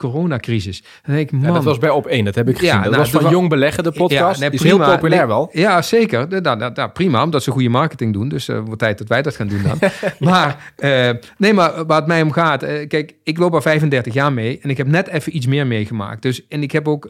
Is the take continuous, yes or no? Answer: yes